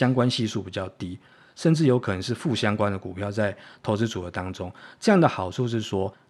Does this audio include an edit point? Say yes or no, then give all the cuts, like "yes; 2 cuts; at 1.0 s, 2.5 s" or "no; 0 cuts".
no; 0 cuts